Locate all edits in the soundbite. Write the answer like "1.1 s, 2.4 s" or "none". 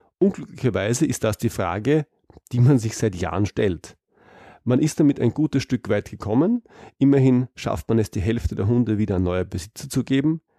3.5 s